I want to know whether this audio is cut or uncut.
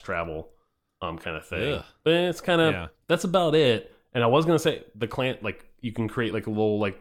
uncut